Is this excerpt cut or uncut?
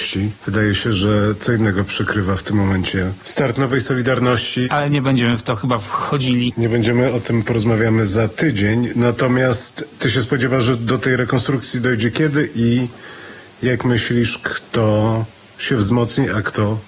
uncut